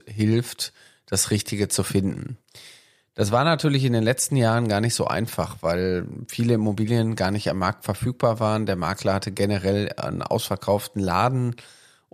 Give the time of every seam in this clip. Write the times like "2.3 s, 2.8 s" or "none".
none